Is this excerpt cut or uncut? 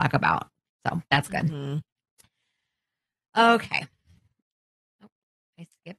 uncut